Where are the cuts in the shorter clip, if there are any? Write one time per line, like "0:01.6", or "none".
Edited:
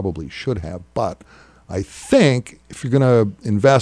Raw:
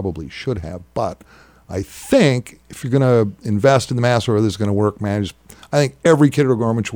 none